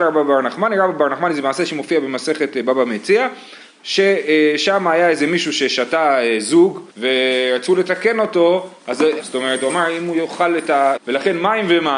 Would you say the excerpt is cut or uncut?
cut